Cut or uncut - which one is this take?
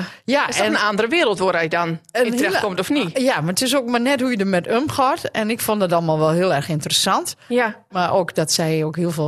cut